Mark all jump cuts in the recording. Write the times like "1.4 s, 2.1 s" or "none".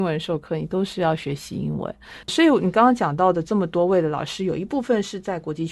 2.2 s